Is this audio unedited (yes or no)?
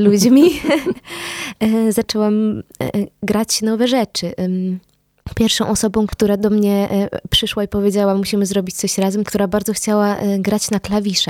no